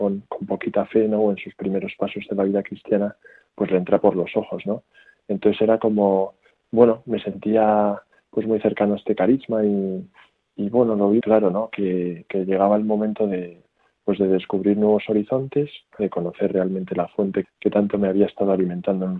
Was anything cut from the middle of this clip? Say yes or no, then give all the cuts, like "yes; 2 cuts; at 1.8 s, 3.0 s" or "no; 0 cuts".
yes; 3 cuts; at 11.2 s, 16.0 s, 17.4 s